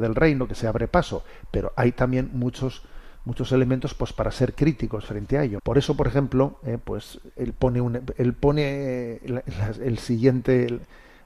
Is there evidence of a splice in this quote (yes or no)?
yes